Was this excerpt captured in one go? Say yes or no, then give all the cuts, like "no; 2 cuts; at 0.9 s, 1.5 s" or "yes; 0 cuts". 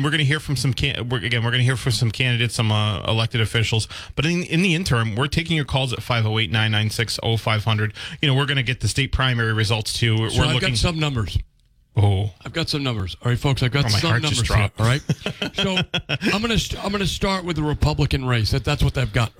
yes; 0 cuts